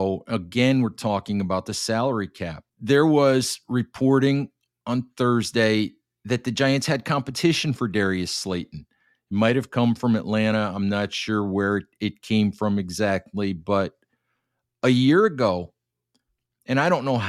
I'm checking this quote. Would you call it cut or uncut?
cut